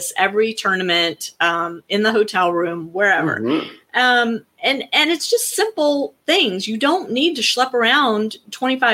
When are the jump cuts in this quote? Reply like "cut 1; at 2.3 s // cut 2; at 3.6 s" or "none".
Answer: none